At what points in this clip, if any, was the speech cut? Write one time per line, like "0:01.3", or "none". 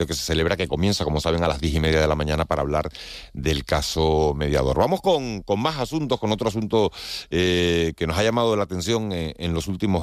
none